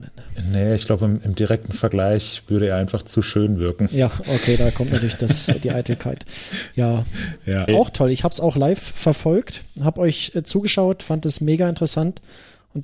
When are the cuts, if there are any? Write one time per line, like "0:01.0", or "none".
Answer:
0:04.2
0:07.7